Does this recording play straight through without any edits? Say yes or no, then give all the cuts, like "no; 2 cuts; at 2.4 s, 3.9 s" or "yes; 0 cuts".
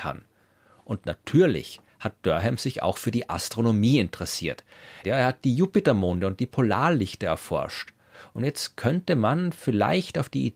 no; 1 cut; at 5.0 s